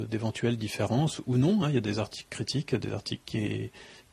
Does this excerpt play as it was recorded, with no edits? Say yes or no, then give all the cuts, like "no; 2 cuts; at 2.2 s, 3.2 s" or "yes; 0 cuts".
yes; 0 cuts